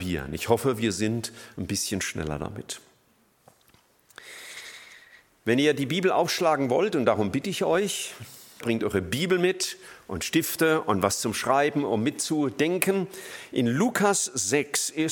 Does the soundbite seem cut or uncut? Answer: cut